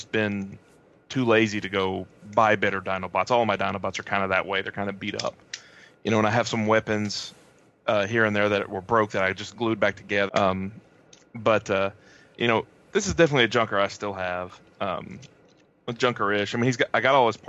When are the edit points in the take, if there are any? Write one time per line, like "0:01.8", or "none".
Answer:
0:10.3